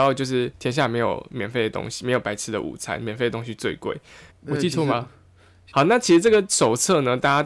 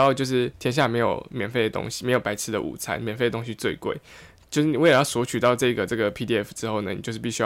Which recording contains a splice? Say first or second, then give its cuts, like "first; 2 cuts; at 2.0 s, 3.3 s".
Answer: first; 2 cuts; at 4.3 s, 5.7 s